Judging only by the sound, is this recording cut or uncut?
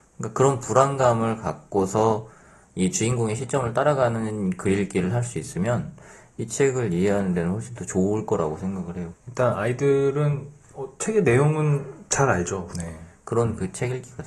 cut